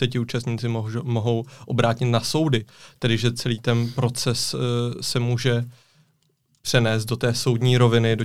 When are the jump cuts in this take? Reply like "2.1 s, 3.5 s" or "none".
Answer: none